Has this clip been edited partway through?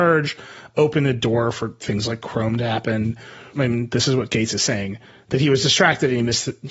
yes; 1 cut; at 3.5 s

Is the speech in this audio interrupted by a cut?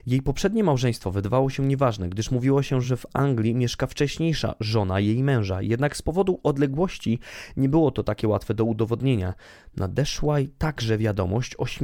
no; 0 cuts

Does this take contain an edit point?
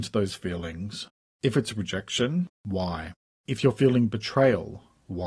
no; 0 cuts

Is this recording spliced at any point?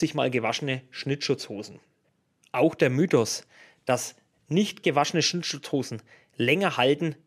no; 0 cuts

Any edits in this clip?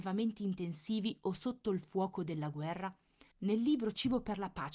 no; 0 cuts

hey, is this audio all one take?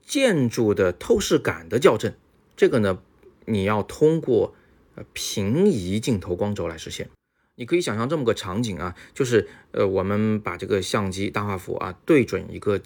yes; 0 cuts

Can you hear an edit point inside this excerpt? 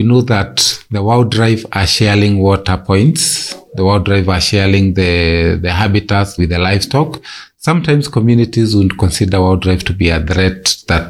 yes; 1 cut; at 6.4 s

